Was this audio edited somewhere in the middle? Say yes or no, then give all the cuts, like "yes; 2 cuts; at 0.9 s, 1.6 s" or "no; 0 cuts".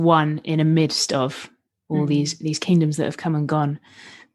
no; 0 cuts